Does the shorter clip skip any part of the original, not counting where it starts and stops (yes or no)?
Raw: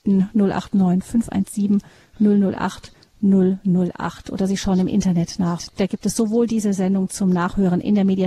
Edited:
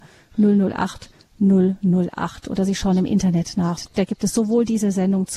no